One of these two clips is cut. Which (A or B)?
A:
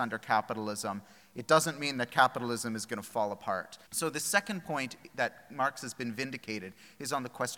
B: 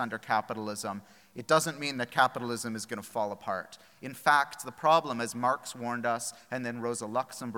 A